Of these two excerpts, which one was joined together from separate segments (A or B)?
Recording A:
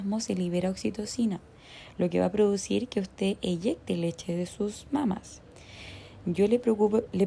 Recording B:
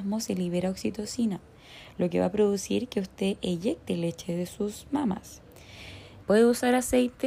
B